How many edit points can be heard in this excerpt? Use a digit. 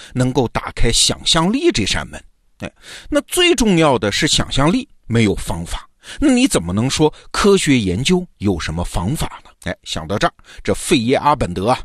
1